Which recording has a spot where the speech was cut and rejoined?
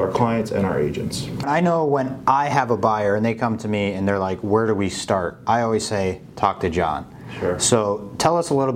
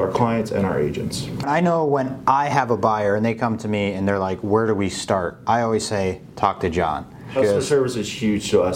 second; 1 cut; at 7.4 s

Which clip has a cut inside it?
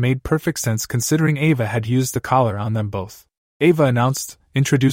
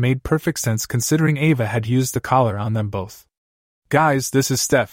first; 1 cut; at 3.4 s

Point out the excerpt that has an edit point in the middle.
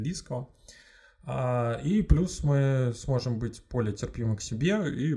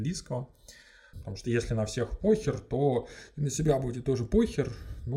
second; 1 cut; at 1.1 s

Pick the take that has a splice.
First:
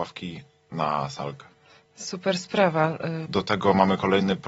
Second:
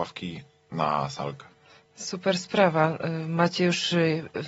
first; 1 cut; at 3.3 s

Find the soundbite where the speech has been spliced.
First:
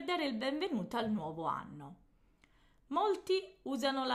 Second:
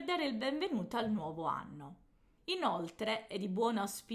second; 1 cut; at 2.4 s

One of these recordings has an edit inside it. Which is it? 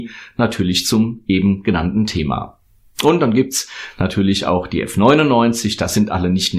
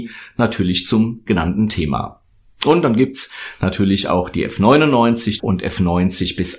second; 2 cuts; at 1.3 s, 5.4 s

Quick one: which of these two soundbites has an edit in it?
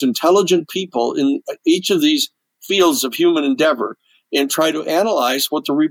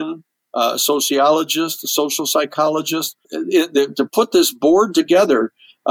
second; 1 cut; at 3.2 s

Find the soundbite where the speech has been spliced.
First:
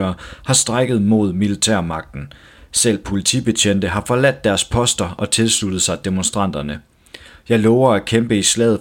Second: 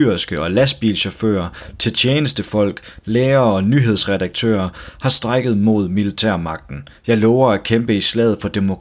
second; 1 cut; at 7.0 s

